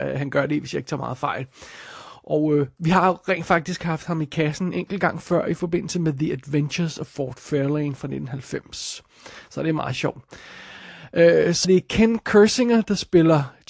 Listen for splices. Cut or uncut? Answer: cut